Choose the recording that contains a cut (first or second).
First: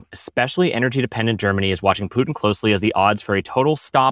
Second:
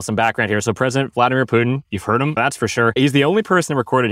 second